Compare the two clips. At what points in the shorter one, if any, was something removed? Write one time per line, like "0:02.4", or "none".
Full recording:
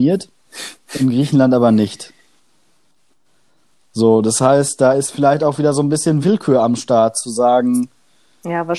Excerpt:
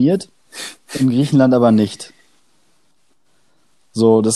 none